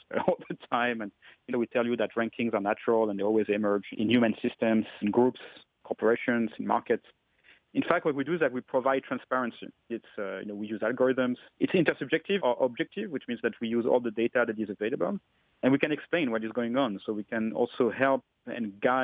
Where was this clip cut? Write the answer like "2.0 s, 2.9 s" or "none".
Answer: 1.5 s, 9.9 s, 12.4 s